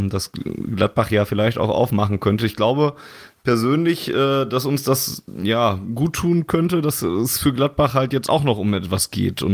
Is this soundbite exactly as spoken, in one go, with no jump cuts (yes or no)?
yes